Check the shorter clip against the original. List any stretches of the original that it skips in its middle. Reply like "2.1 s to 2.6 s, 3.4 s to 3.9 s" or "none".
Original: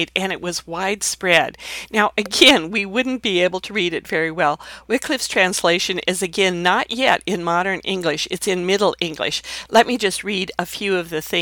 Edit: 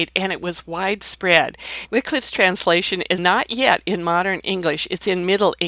1.9 s to 4.8 s, 6.2 s to 6.6 s